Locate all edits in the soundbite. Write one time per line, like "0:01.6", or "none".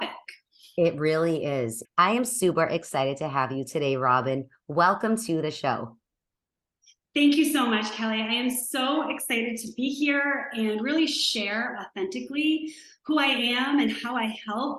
0:01.8